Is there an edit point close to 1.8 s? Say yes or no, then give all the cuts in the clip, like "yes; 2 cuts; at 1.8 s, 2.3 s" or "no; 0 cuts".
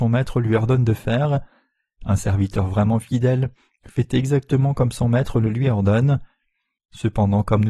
no; 1 cut; at 6.8 s